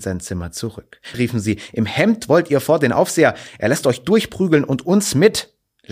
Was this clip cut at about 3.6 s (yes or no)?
no